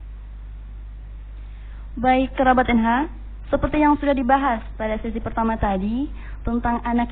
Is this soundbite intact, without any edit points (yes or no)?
yes